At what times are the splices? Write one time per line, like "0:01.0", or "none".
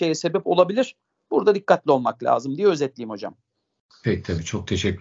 none